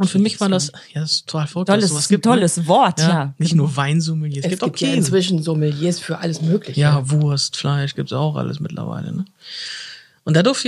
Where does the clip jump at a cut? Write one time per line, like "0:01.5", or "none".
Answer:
none